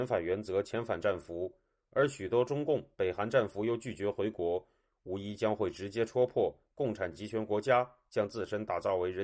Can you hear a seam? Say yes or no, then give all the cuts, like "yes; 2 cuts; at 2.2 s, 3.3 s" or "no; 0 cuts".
no; 0 cuts